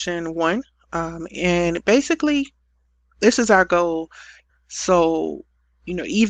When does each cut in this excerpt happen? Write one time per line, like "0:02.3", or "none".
0:04.5